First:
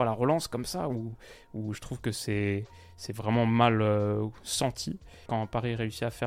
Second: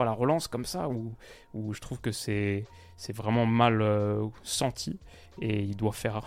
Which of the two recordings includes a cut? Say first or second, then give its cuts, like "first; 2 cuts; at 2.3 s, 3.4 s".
first; 1 cut; at 5.3 s